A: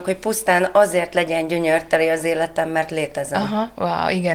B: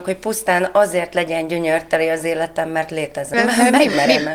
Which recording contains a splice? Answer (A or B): B